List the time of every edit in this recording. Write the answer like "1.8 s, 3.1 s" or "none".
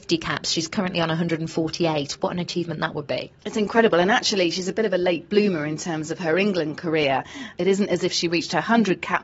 none